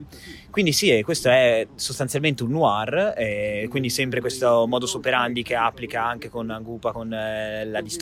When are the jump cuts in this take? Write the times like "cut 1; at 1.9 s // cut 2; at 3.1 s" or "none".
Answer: none